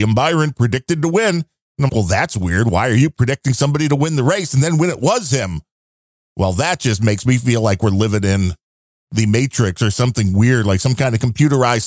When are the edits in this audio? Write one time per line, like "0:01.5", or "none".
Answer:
0:01.9